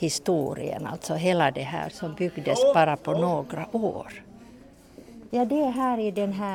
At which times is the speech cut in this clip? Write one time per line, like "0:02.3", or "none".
0:01.9
0:05.3